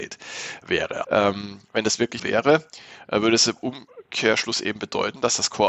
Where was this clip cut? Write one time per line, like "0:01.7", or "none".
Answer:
0:01.0
0:02.2